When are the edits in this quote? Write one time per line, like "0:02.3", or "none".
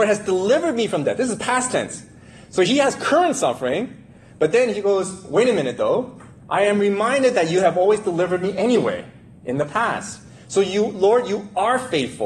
none